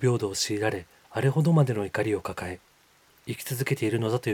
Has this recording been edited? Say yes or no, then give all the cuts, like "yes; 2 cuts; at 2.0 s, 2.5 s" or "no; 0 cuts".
yes; 1 cut; at 1.0 s